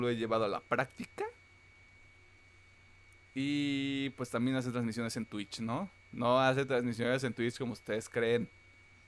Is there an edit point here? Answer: no; 0 cuts

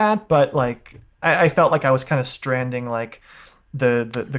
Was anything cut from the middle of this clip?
no; 0 cuts

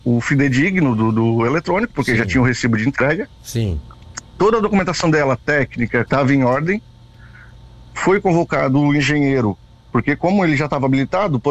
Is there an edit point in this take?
yes; 1 cut; at 6.1 s

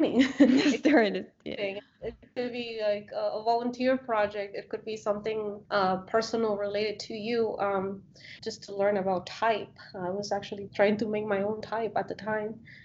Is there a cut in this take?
yes; 3 cuts; at 5.7 s, 8.4 s, 10.7 s

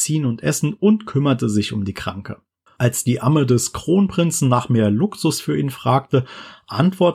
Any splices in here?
yes; 1 cut; at 2.7 s

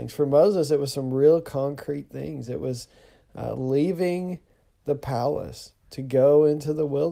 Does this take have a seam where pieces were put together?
no; 0 cuts

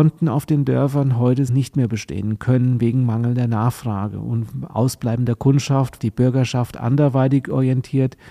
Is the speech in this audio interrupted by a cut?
yes; 2 cuts; at 1.5 s, 6.0 s

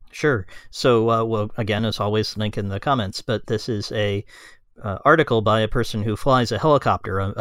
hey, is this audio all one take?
yes; 0 cuts

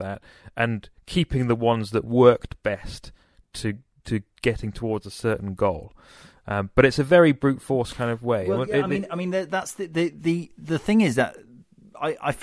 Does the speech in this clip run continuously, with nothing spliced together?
yes; 0 cuts

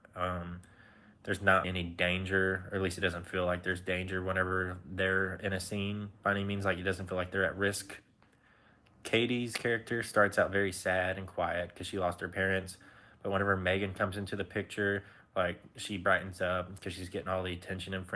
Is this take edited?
yes; 1 cut; at 1.6 s

